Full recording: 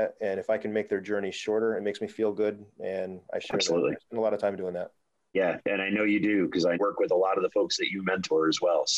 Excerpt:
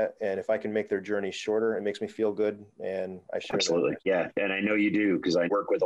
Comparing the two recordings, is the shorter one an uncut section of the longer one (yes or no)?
no